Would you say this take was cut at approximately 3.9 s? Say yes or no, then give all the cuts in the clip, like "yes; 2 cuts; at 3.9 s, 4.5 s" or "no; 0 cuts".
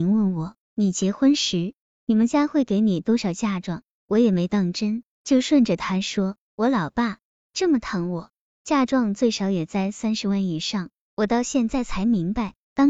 no; 0 cuts